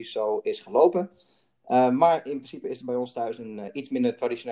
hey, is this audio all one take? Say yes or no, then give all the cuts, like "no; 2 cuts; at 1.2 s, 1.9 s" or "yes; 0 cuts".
yes; 0 cuts